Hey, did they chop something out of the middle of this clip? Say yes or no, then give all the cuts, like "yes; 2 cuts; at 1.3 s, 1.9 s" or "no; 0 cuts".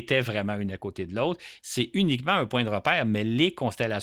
yes; 1 cut; at 1.6 s